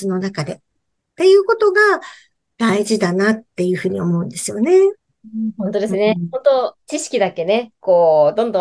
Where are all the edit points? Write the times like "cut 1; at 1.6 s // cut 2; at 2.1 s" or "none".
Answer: none